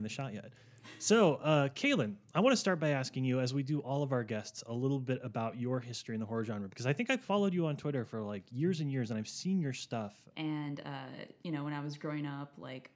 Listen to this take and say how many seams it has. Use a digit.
1